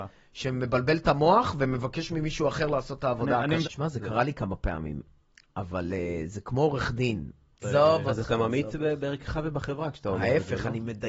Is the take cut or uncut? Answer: cut